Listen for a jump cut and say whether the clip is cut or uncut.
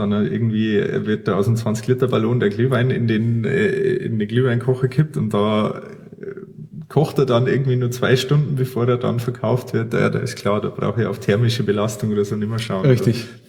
uncut